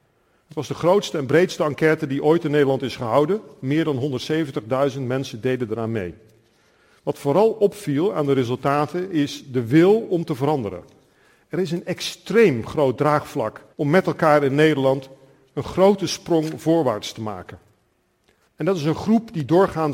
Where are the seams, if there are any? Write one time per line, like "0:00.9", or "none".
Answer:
0:13.7
0:18.5